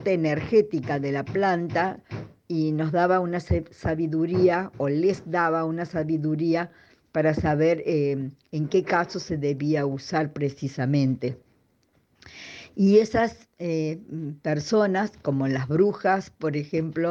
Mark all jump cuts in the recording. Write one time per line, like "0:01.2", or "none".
none

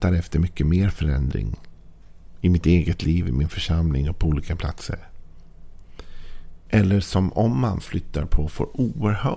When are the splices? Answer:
0:06.7

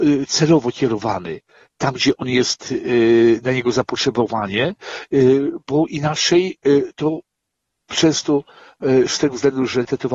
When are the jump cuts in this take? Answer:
none

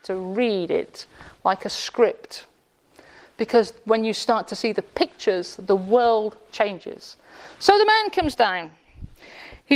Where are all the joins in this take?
none

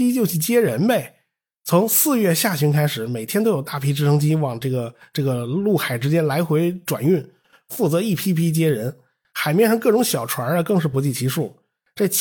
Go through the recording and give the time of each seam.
none

